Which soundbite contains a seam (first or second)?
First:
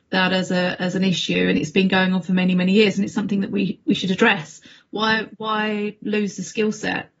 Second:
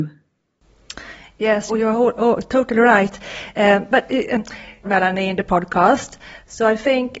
second